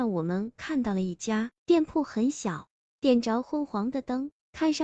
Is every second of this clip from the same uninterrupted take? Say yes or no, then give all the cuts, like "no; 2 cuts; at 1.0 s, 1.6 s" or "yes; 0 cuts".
no; 1 cut; at 1.6 s